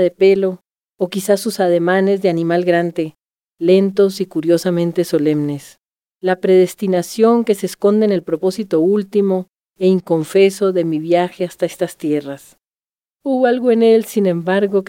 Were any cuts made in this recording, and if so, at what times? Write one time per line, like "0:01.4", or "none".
0:06.0
0:13.1